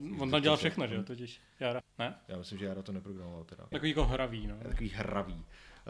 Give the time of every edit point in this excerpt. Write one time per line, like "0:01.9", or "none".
0:01.8
0:03.7